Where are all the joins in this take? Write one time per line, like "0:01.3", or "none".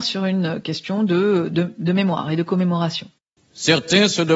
0:03.4